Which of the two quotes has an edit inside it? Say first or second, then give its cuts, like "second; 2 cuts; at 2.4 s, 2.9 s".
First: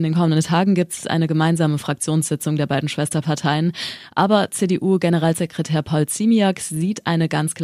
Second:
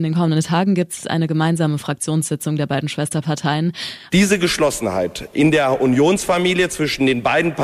second; 1 cut; at 4.1 s